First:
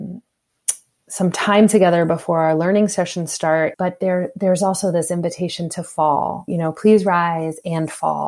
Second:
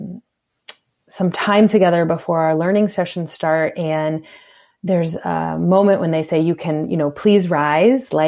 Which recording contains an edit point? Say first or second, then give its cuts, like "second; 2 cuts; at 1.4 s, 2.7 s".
first; 2 cuts; at 3.7 s, 6.5 s